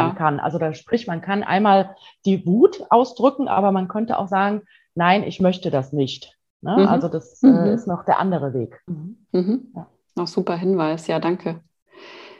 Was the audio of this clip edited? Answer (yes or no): yes